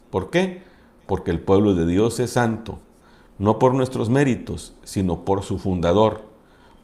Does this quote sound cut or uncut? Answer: uncut